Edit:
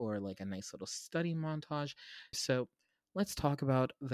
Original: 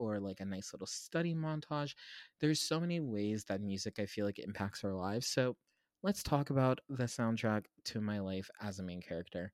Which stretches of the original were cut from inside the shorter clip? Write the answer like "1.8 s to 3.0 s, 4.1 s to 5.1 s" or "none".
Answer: 2.3 s to 5.2 s